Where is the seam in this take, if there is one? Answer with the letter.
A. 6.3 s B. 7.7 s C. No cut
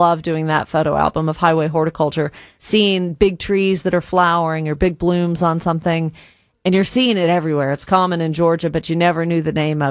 C